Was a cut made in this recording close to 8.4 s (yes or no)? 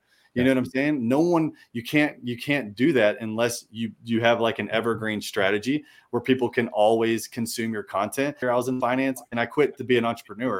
yes